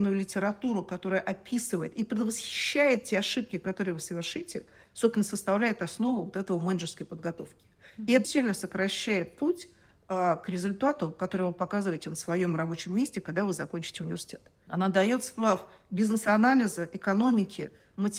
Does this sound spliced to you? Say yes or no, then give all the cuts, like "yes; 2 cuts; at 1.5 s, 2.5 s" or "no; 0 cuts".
yes; 2 cuts; at 8.2 s, 14.7 s